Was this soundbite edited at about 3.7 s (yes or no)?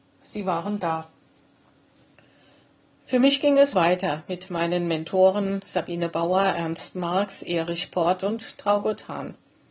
yes